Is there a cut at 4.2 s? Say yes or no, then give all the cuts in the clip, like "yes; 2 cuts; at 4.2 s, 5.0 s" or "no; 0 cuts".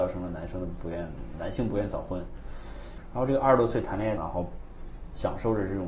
yes; 1 cut; at 4.2 s